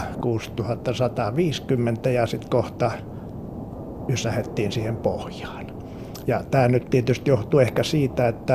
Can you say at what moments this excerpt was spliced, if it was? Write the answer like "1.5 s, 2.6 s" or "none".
6.2 s